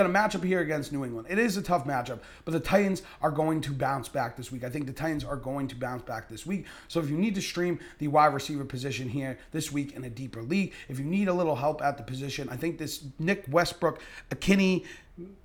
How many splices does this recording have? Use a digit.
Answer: 0